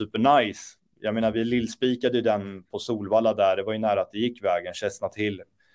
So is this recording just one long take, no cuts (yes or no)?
yes